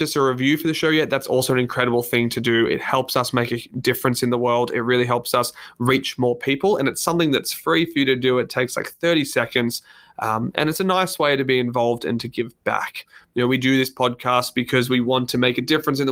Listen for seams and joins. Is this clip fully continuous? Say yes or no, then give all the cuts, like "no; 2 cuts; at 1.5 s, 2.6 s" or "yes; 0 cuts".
yes; 0 cuts